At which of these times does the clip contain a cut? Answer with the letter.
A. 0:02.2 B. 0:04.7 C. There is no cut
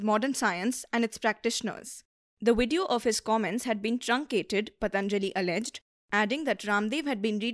C